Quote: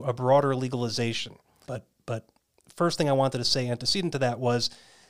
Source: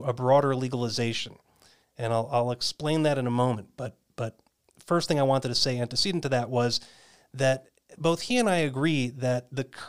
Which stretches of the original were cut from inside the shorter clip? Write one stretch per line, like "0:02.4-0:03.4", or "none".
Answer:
0:01.6-0:03.7